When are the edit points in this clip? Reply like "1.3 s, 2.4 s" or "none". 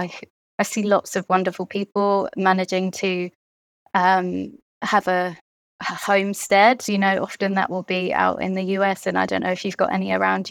none